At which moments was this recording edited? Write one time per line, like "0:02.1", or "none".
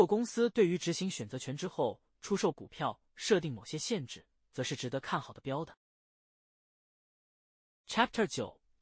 none